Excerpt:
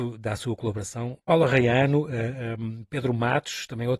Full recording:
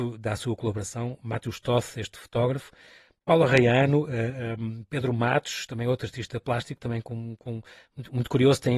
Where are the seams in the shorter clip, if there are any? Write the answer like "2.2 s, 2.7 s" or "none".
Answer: 1.2 s